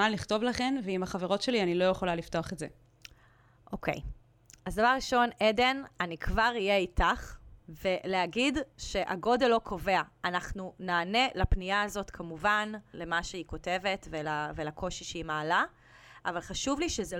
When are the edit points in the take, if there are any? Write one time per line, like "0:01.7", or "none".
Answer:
0:07.6
0:12.9